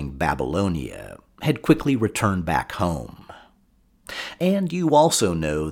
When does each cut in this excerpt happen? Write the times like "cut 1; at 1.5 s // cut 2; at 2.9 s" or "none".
cut 1; at 4.4 s

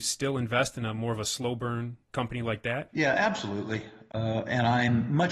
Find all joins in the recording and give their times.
cut 1; at 4.1 s

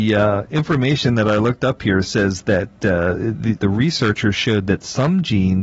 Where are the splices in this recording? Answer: cut 1; at 3.6 s

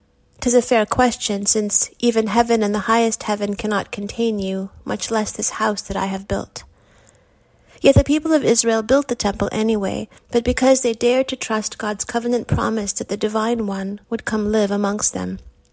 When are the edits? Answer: cut 1; at 10.2 s // cut 2; at 14.0 s

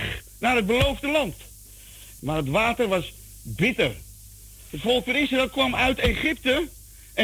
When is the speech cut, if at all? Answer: cut 1; at 2.2 s // cut 2; at 4.7 s

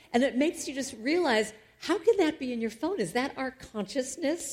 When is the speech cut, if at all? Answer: none

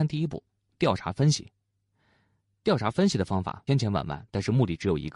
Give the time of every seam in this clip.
cut 1; at 3.7 s

